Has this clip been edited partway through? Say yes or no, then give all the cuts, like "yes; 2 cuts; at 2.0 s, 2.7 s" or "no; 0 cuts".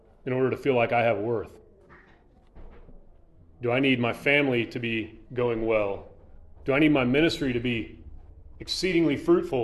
yes; 2 cuts; at 5.3 s, 6.6 s